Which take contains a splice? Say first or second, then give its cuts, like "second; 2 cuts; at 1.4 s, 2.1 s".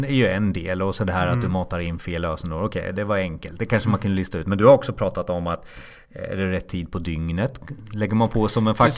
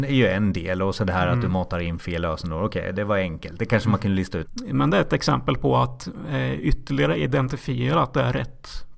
second; 1 cut; at 4.4 s